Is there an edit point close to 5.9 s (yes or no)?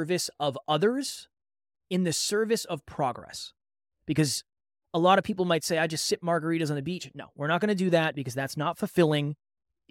no